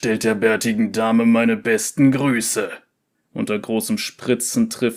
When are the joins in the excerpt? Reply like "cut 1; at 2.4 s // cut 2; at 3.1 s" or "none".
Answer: cut 1; at 3.1 s